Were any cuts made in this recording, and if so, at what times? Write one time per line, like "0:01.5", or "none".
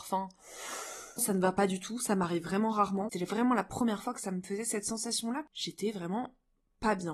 0:01.2
0:03.1